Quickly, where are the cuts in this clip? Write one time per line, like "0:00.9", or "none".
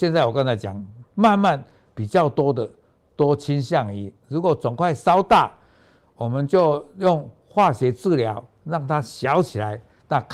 none